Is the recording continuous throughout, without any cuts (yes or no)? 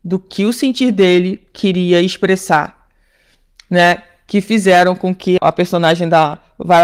no